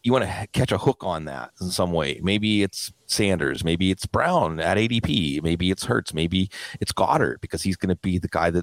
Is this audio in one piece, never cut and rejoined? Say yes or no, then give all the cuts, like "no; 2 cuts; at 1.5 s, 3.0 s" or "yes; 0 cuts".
yes; 0 cuts